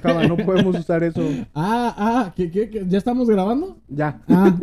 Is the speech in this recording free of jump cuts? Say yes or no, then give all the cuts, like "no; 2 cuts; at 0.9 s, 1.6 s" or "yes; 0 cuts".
yes; 0 cuts